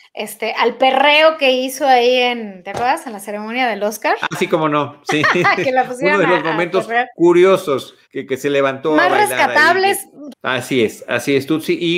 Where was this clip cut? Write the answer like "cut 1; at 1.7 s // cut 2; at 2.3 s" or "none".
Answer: cut 1; at 8.0 s // cut 2; at 10.3 s